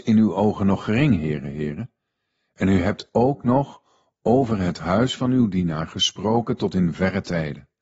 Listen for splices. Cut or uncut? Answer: uncut